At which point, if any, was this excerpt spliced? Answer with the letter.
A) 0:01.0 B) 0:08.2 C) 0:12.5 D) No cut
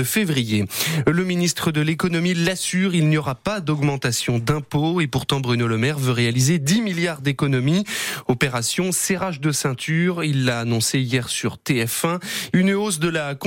C